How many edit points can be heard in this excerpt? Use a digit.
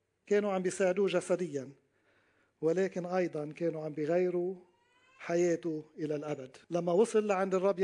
1